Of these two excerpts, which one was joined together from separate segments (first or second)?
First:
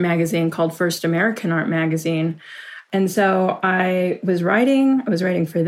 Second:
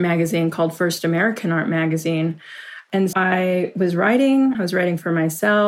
second